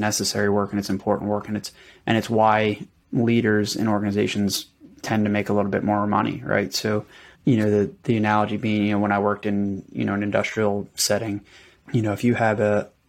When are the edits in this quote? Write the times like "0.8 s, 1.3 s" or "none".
7.3 s, 11.8 s